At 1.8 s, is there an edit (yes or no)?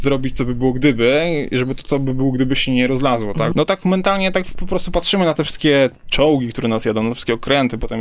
no